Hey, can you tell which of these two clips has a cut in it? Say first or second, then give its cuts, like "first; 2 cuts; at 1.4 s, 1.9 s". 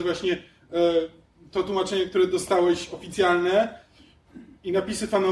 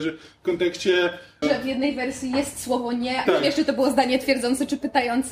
second; 2 cuts; at 1.4 s, 3.3 s